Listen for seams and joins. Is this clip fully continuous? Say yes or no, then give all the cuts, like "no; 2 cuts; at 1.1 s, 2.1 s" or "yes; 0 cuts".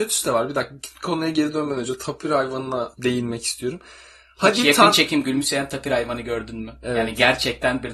yes; 0 cuts